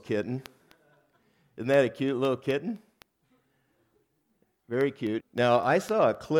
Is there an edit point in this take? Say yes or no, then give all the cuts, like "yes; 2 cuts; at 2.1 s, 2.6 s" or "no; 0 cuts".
yes; 1 cut; at 5.2 s